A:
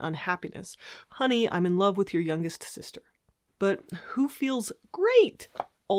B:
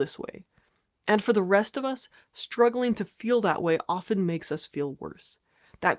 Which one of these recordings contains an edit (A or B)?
A